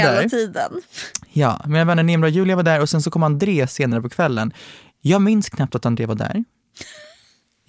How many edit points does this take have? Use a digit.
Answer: 0